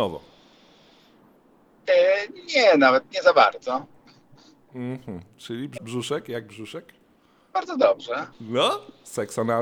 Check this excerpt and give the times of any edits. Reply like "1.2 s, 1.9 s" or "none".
5.8 s, 8.3 s